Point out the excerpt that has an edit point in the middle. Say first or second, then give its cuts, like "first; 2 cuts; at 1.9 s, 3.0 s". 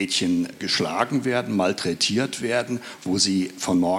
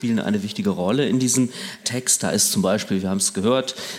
first; 1 cut; at 3.0 s